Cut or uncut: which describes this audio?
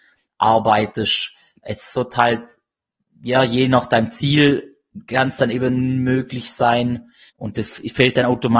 cut